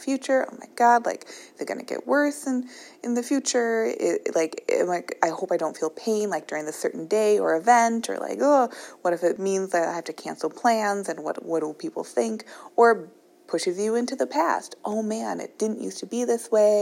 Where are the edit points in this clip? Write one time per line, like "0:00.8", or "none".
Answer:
0:09.4